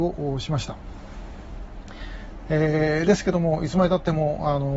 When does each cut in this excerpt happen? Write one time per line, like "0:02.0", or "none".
0:02.4